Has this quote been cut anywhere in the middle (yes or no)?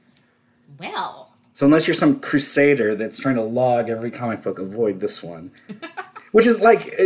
no